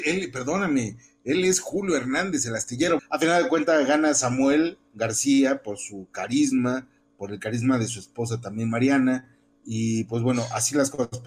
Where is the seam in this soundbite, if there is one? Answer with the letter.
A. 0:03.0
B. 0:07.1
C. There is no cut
A